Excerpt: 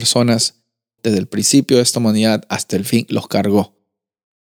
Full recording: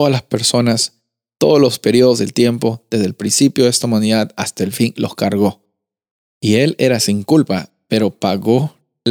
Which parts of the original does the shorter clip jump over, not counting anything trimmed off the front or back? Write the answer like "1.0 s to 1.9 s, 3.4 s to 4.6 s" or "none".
1.4 s to 2.9 s